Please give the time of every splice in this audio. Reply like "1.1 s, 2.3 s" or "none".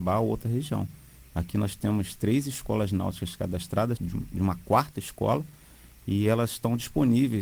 4.0 s